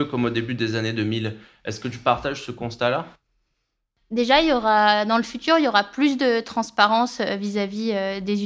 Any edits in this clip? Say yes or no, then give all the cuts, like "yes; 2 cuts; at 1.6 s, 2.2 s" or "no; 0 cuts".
no; 0 cuts